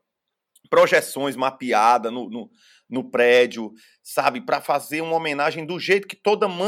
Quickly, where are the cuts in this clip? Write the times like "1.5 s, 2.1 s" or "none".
none